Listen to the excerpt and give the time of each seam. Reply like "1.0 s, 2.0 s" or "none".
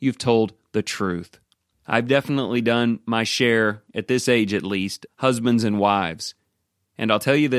1.7 s, 5.1 s